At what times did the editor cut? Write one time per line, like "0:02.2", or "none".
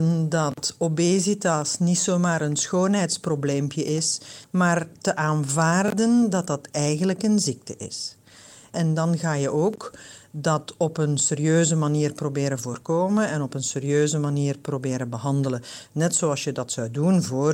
none